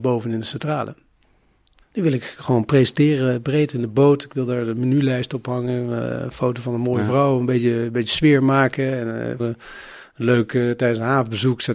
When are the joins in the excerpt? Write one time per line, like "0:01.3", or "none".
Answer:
0:01.8
0:09.4

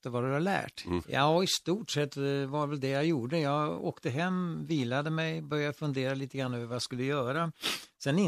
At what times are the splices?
0:01.0

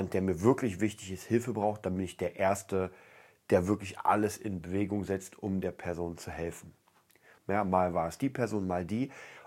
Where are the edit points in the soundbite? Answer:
0:07.4

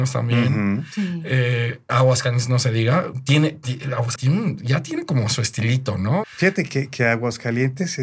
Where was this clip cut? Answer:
0:04.2
0:06.2

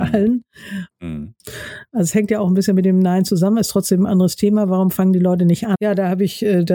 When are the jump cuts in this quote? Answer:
0:00.9
0:05.7

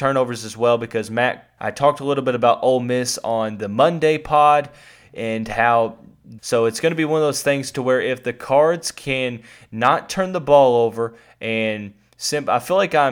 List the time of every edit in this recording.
0:01.6
0:06.4

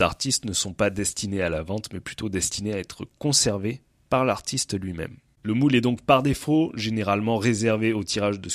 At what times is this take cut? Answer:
0:05.3

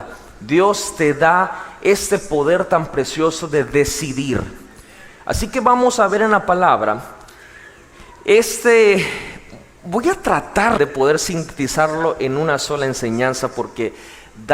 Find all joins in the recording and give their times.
0:10.8

